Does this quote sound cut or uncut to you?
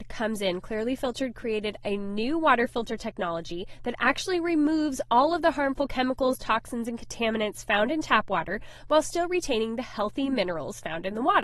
uncut